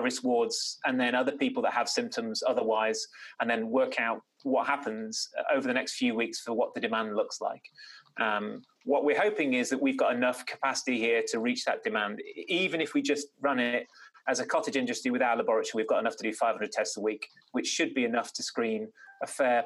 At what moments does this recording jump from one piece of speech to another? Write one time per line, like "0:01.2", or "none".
none